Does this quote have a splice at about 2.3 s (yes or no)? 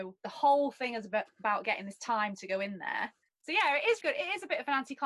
no